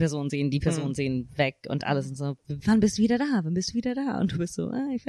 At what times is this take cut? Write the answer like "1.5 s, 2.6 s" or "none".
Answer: none